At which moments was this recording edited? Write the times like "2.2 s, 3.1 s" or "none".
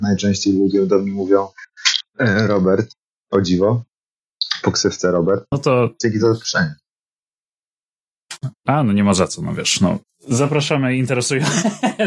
5.5 s